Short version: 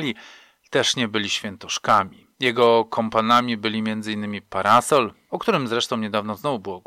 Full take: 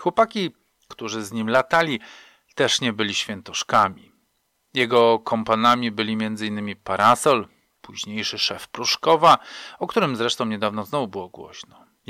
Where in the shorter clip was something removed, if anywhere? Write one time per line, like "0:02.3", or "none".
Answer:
0:02.3
0:05.3